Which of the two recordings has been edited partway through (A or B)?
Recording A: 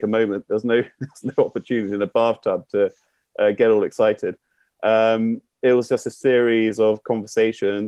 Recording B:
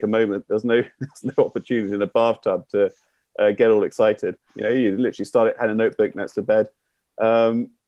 B